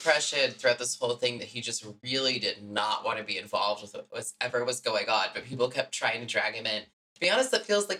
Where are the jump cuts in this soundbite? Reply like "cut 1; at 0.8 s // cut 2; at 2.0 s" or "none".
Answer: none